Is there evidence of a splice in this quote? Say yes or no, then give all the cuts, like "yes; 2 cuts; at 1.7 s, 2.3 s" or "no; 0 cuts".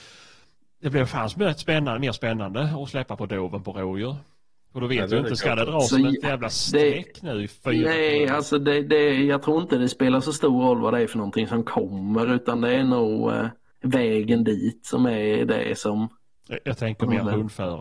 no; 0 cuts